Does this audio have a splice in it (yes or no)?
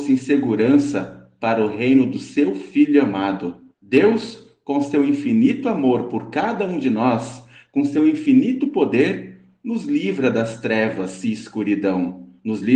yes